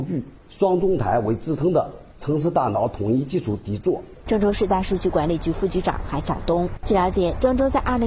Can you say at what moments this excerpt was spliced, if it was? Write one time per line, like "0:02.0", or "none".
0:04.3
0:06.8